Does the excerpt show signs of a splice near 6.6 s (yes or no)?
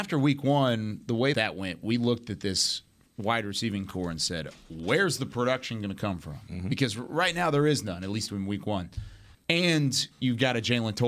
no